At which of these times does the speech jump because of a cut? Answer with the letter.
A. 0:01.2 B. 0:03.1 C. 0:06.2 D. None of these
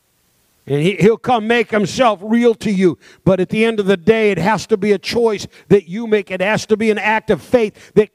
D